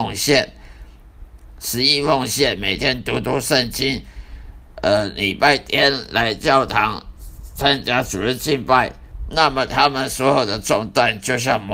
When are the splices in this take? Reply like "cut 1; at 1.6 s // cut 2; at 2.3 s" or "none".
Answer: none